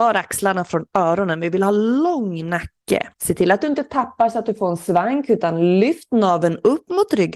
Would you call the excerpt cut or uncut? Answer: cut